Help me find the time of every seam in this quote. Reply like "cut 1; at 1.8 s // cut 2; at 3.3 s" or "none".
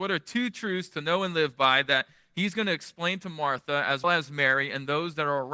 cut 1; at 4.0 s